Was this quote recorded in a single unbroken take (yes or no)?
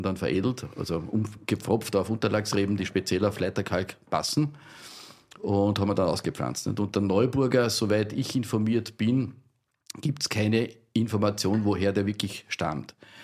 yes